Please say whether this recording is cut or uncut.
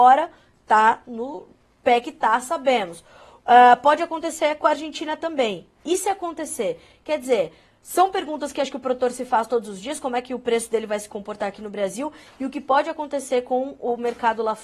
uncut